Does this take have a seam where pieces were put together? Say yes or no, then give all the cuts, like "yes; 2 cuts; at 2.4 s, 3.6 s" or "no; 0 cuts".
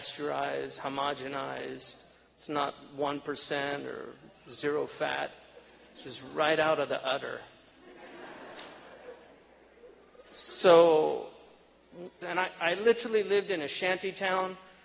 yes; 1 cut; at 12.2 s